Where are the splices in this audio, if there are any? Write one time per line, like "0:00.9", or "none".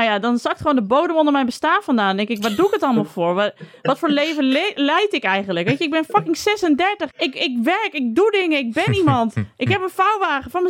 0:07.1